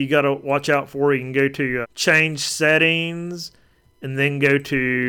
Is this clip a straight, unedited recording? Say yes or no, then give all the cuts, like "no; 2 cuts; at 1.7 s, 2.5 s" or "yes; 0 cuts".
no; 1 cut; at 1.8 s